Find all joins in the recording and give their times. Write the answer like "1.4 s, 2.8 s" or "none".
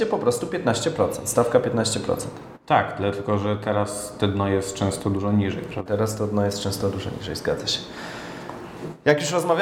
5.9 s